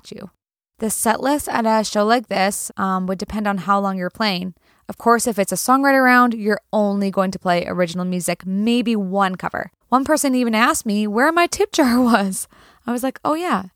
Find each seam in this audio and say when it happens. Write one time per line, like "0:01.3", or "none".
0:02.7
0:09.8